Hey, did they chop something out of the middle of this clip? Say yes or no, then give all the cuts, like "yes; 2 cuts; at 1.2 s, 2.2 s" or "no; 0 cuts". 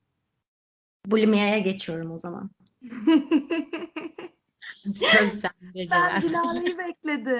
no; 0 cuts